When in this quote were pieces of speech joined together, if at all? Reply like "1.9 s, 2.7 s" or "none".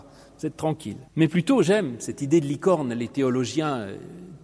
1.1 s